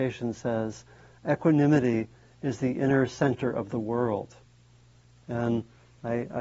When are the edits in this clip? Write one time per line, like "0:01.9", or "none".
none